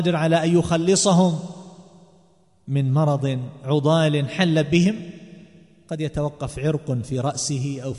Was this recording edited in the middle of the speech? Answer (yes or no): no